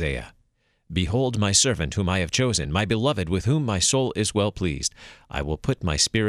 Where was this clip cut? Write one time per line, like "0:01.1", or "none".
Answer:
none